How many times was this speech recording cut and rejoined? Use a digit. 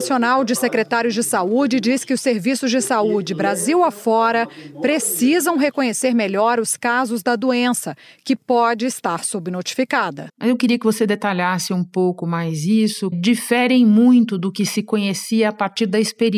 2